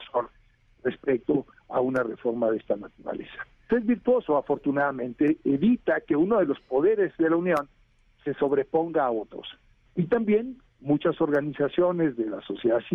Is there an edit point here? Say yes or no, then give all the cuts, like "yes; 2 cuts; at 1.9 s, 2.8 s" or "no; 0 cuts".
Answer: yes; 2 cuts; at 3.7 s, 9.9 s